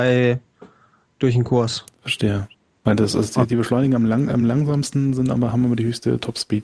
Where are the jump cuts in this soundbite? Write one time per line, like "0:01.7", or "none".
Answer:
none